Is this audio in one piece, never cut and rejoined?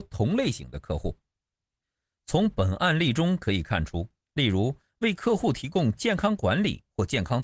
no; 1 cut; at 4.3 s

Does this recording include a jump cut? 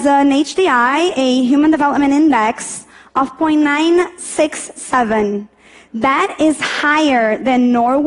no; 0 cuts

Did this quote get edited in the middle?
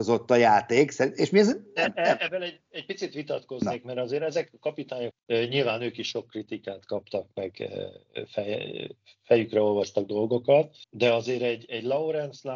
yes; 2 cuts; at 5.1 s, 10.8 s

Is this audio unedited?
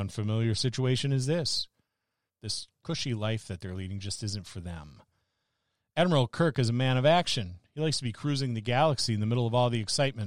no; 1 cut; at 2.3 s

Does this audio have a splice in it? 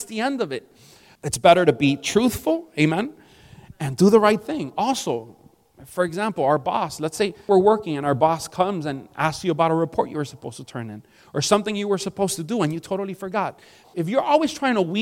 yes; 2 cuts; at 1.2 s, 13.8 s

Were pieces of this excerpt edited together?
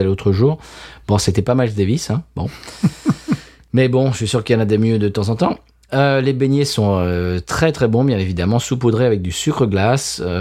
no; 0 cuts

